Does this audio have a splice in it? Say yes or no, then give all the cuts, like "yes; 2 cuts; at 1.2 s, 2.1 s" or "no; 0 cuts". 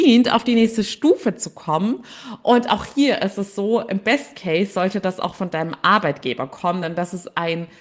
no; 0 cuts